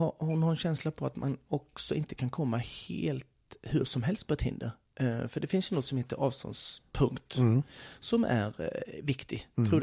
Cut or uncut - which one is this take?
uncut